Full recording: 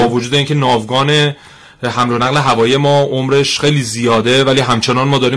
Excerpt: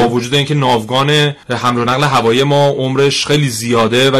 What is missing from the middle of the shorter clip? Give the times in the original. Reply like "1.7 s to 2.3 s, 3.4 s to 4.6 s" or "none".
1.4 s to 1.8 s